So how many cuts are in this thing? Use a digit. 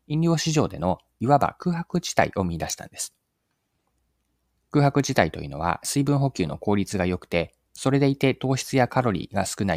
0